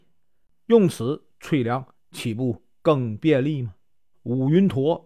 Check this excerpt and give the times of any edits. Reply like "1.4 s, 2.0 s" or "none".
4.1 s